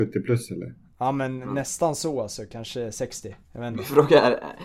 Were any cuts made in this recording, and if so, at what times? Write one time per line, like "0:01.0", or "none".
none